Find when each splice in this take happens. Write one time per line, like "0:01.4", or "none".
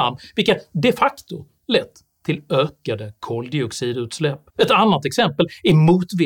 0:04.5